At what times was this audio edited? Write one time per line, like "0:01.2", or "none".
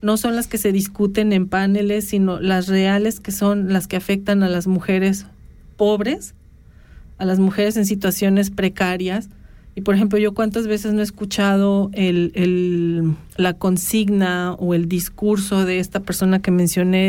0:13.3